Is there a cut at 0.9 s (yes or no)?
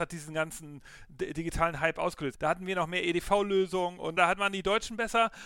no